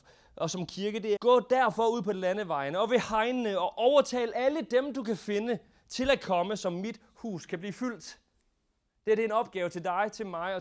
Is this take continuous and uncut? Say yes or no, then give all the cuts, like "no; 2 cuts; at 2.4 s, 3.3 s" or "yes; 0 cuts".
no; 1 cut; at 1.2 s